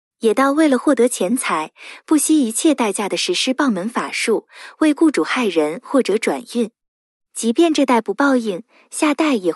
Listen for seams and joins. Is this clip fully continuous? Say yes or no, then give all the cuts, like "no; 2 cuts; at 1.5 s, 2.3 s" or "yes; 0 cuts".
no; 1 cut; at 7.2 s